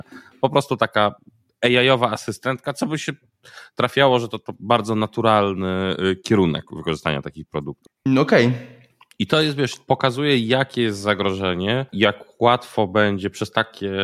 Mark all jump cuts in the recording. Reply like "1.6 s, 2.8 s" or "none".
7.9 s, 11.9 s